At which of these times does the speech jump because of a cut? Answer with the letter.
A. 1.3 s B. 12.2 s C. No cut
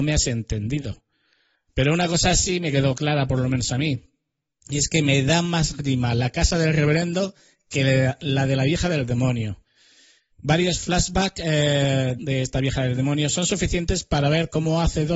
B